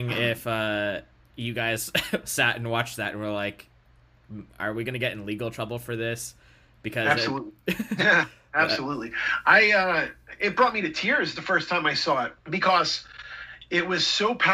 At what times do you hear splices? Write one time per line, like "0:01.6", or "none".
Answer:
0:12.4